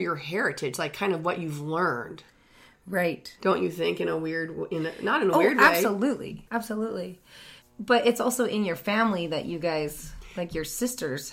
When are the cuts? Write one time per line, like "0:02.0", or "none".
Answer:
0:06.5
0:07.6